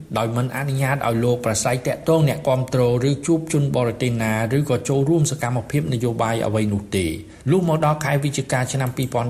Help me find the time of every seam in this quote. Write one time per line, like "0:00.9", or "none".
0:07.4